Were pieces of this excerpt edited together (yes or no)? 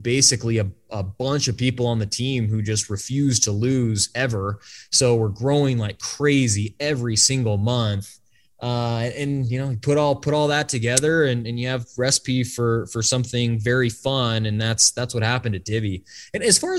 no